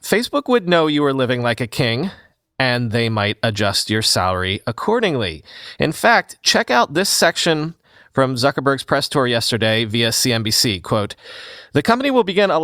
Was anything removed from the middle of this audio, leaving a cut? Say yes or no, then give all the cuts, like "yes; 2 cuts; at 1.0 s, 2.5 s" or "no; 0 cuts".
no; 0 cuts